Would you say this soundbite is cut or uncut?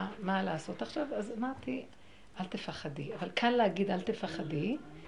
cut